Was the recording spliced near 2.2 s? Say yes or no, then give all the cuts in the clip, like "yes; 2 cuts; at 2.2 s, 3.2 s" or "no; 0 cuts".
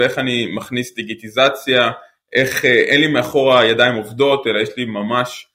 no; 0 cuts